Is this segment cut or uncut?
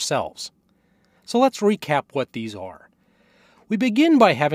cut